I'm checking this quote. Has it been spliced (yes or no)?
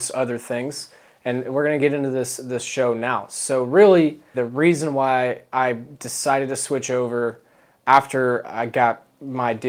yes